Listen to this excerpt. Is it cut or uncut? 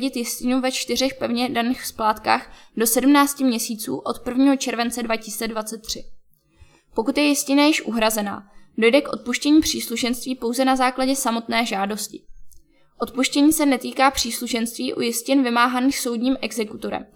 uncut